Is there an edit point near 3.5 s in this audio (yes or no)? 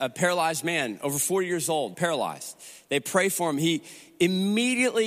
no